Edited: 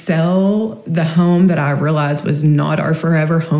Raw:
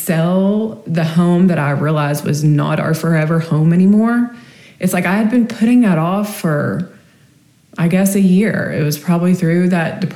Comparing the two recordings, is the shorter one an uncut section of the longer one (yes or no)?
yes